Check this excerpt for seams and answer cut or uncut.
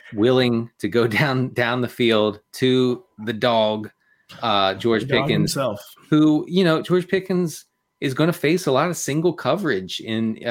uncut